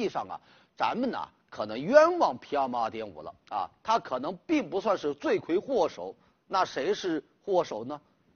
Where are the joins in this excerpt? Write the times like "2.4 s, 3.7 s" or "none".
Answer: none